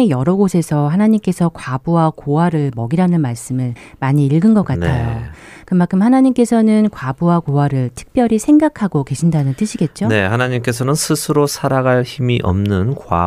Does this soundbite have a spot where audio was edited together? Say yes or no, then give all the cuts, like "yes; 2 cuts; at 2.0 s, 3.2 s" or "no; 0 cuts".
no; 0 cuts